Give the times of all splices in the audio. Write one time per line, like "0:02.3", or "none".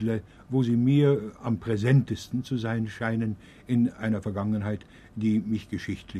none